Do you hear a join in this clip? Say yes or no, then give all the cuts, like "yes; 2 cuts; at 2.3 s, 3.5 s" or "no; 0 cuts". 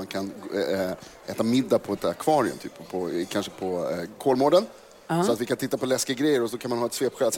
no; 0 cuts